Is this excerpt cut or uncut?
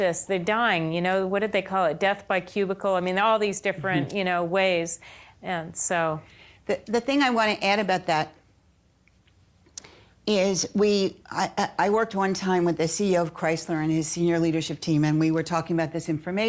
uncut